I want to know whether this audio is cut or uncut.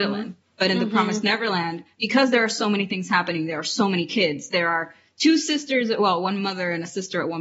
uncut